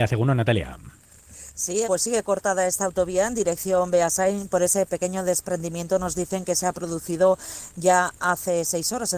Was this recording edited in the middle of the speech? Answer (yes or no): yes